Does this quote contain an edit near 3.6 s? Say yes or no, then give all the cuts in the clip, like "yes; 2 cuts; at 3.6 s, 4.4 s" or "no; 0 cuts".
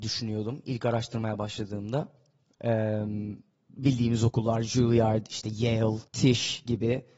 no; 1 cut; at 6.1 s